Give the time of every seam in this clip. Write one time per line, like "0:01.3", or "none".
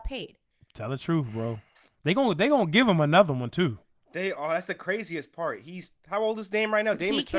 none